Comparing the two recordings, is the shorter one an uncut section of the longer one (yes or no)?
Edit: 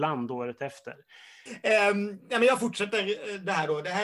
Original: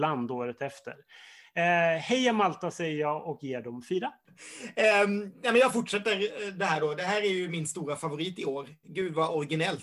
no